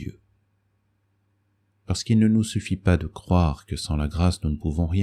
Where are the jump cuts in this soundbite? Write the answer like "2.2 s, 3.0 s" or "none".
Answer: 1.7 s